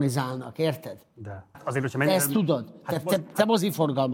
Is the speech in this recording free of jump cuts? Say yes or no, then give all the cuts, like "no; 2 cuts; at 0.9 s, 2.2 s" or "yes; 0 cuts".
no; 1 cut; at 1.5 s